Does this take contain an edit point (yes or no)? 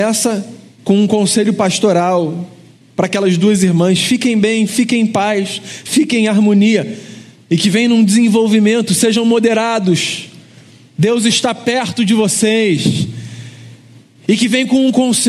no